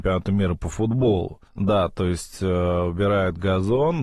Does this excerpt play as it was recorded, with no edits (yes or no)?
no